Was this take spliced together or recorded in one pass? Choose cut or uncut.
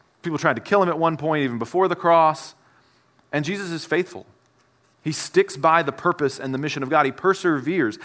uncut